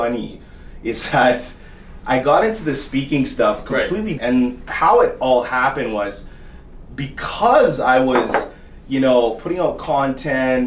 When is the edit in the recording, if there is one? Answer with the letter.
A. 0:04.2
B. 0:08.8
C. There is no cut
A